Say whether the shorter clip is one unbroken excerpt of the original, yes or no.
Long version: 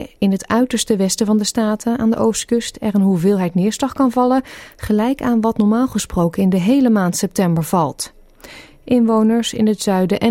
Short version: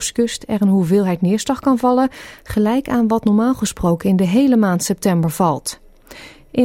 yes